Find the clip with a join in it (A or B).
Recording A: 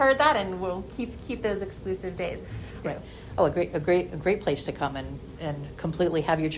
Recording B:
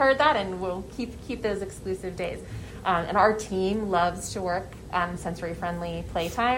A